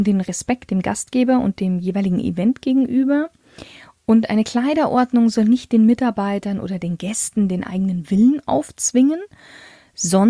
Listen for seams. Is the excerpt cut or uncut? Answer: uncut